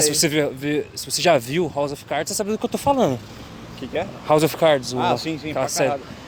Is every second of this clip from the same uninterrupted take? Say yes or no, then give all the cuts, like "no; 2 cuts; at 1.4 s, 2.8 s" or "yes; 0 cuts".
yes; 0 cuts